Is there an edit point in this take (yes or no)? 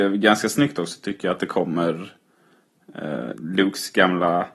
yes